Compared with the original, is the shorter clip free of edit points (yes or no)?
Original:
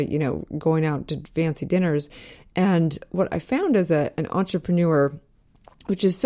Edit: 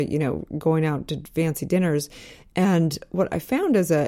yes